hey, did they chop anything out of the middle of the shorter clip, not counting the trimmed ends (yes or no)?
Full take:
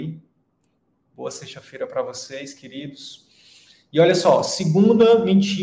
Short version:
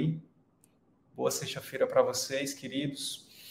no